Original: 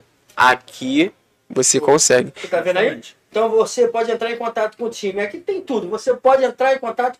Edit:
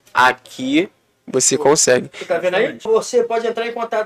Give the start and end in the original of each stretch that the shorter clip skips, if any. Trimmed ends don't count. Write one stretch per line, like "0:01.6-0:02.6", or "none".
0:03.1-0:03.5